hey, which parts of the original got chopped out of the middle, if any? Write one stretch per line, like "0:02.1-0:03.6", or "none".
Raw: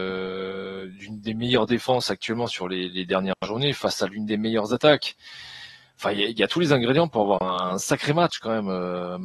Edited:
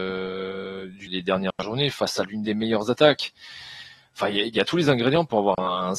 0:01.1-0:02.9